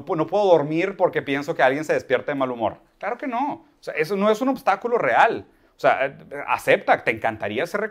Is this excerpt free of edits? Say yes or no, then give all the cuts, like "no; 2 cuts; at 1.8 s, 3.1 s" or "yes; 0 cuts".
yes; 0 cuts